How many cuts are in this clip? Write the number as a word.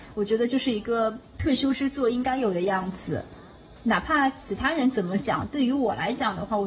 zero